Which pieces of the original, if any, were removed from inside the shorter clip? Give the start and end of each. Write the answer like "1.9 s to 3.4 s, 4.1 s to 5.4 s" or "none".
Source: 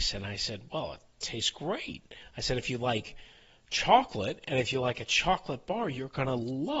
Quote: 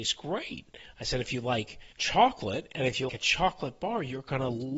3.3 s to 3.6 s, 4.8 s to 4.9 s